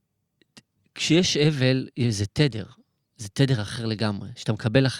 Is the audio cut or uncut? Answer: uncut